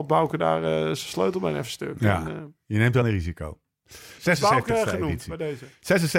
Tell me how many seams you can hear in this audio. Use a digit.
2